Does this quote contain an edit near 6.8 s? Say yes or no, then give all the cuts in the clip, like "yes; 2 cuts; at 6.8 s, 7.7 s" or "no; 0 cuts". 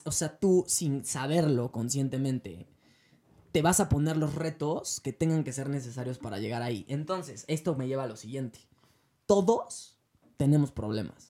no; 0 cuts